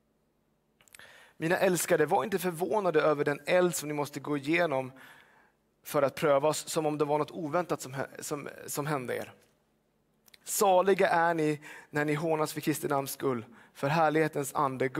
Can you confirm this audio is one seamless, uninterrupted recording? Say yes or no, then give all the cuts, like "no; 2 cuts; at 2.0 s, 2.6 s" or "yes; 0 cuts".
no; 1 cut; at 10.4 s